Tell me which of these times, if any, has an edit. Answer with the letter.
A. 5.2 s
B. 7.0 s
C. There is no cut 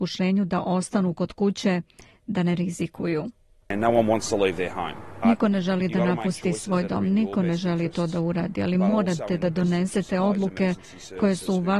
A